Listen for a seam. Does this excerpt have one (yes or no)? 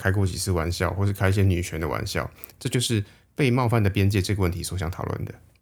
yes